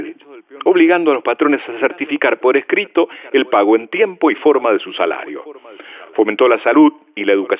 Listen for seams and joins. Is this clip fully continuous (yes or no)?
yes